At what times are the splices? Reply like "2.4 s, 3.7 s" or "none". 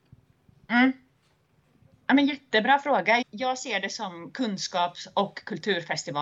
3.2 s